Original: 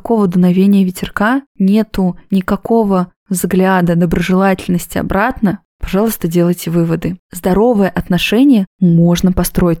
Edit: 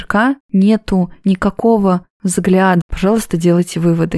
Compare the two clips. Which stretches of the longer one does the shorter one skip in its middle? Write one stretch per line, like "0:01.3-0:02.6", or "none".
0:03.9-0:05.7